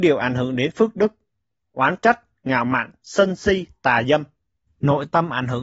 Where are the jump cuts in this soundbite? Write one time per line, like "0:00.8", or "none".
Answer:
0:04.7